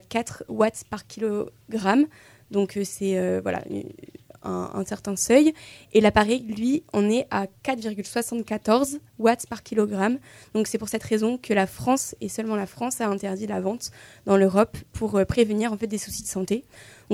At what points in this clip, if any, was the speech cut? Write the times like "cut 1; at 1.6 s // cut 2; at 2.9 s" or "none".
none